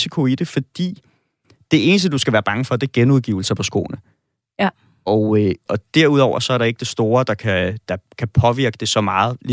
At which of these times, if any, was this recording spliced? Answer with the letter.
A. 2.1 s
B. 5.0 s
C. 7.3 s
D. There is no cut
D